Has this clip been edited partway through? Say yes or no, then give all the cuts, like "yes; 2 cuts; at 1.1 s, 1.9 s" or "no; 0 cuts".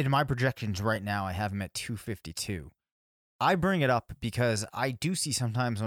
no; 0 cuts